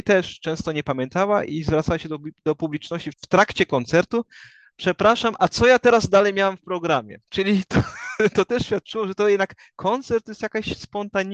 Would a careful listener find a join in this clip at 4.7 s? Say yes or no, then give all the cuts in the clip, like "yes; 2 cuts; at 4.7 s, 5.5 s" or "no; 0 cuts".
no; 2 cuts; at 3.1 s, 7.2 s